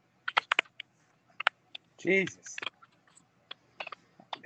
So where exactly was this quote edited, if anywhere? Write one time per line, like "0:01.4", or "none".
none